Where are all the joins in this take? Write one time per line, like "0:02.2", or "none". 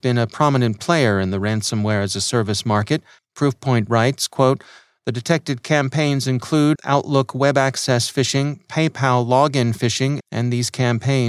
0:03.2
0:06.8
0:10.2